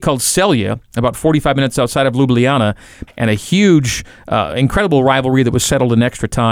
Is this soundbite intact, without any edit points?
no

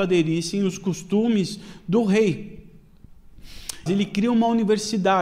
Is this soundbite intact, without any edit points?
no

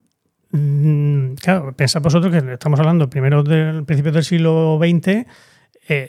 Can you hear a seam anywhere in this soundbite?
no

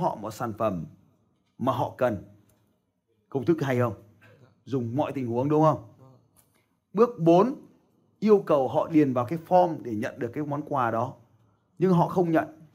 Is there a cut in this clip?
no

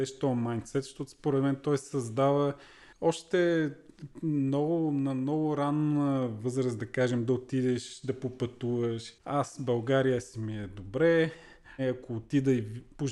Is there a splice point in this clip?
yes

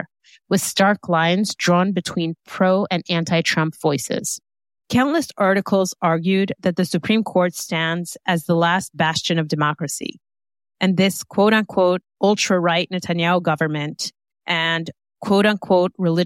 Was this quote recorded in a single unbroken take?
no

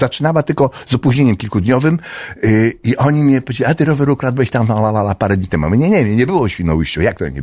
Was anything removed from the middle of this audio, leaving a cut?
no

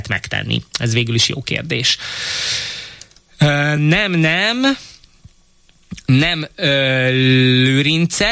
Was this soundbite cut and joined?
no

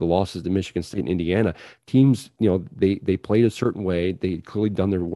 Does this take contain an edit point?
no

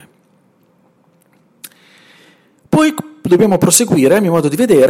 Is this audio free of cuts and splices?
yes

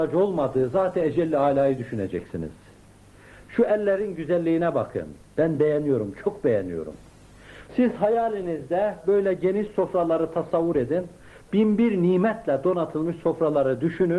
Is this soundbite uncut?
no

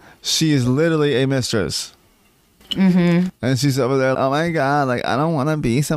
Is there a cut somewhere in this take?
yes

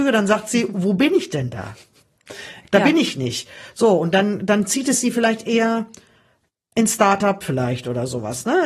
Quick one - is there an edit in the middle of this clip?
no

